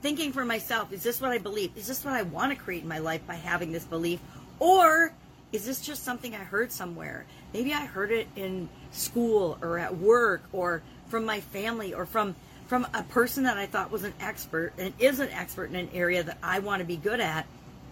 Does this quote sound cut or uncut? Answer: uncut